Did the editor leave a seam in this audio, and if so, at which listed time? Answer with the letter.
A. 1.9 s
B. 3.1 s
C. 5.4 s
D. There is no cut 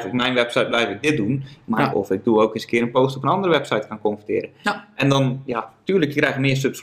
A